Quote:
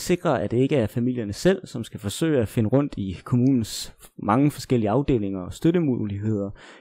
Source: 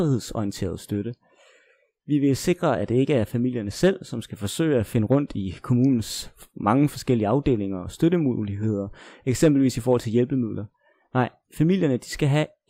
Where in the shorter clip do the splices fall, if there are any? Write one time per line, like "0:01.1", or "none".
none